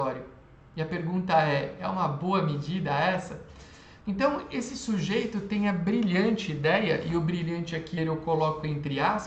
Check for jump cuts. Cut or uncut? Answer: cut